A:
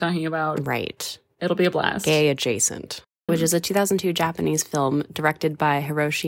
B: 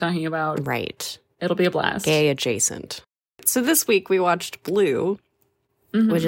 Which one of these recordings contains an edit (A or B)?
A